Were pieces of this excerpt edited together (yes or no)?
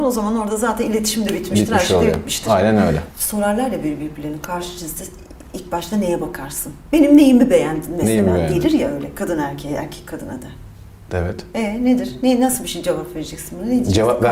no